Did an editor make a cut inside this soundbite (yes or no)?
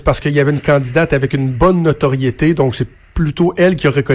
no